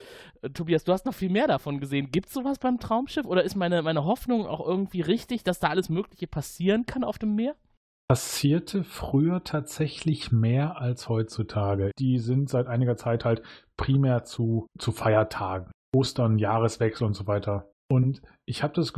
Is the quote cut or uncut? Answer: cut